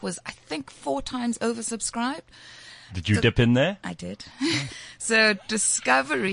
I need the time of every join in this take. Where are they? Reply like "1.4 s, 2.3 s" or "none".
2.9 s, 4.7 s